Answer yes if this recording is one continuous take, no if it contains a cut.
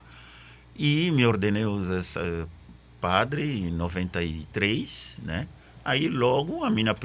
yes